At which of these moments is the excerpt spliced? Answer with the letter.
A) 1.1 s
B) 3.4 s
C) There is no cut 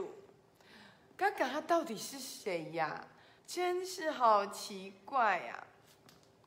B